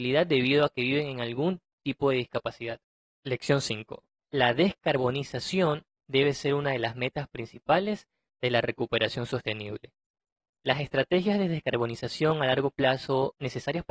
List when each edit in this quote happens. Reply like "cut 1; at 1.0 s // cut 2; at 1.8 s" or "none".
none